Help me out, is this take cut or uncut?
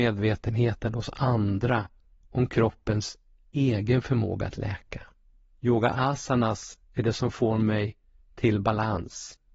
cut